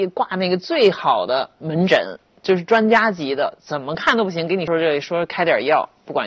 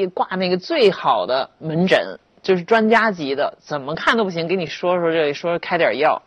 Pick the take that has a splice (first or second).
first